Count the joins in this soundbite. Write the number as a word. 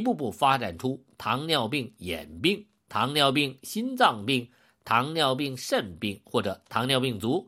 zero